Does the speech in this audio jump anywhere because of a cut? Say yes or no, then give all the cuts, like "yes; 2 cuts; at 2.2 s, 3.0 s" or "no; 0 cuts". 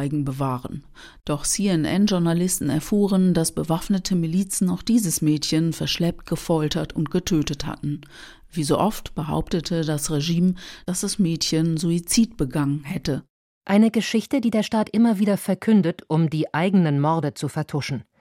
no; 0 cuts